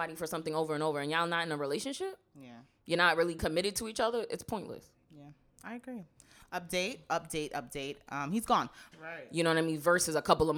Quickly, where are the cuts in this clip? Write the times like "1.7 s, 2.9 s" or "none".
8.9 s